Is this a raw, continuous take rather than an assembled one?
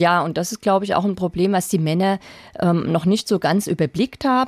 yes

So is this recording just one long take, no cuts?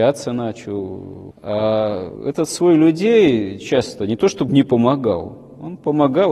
yes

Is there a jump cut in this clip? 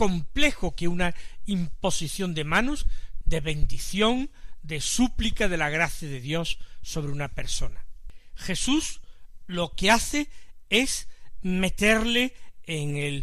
yes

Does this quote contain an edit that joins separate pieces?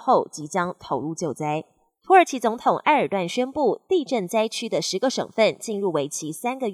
yes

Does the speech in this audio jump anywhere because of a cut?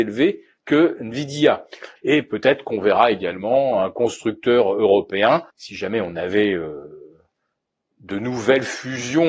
yes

